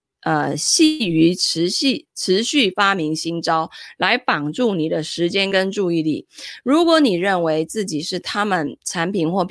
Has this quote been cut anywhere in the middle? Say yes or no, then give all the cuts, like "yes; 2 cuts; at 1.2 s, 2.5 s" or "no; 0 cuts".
no; 0 cuts